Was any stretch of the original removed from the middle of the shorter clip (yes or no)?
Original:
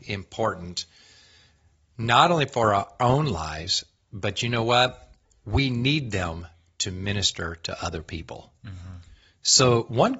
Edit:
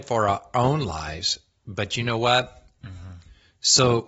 yes